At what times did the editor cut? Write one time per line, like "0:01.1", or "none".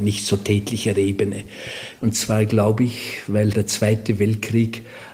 0:02.0
0:03.5